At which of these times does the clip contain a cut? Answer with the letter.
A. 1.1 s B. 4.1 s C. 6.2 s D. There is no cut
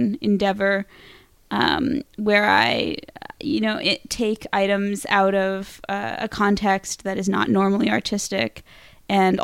D